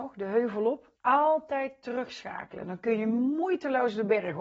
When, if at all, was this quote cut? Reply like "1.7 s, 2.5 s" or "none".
1.0 s